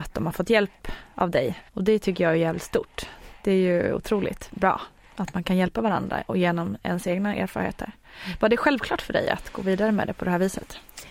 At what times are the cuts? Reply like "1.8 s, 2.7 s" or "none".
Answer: 1.7 s